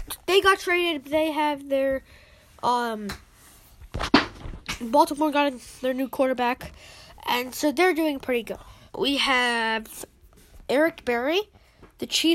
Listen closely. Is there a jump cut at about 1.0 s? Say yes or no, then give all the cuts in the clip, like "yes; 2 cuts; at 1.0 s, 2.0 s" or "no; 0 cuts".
yes; 2 cuts; at 1.0 s, 8.9 s